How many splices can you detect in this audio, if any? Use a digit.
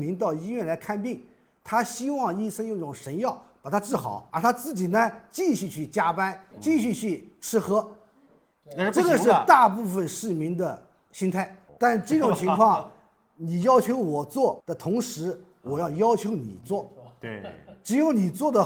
2